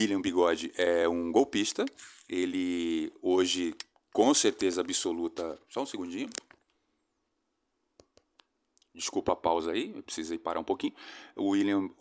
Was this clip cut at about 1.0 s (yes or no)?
no